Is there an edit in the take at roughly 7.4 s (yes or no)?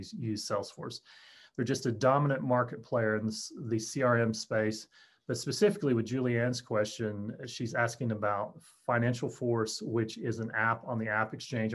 no